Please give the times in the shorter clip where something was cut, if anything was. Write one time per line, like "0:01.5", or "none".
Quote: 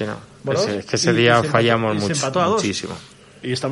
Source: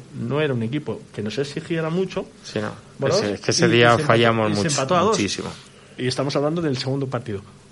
none